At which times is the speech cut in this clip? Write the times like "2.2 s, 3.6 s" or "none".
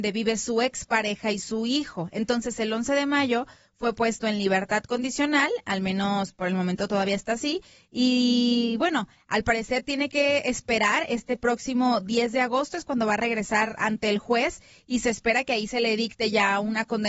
none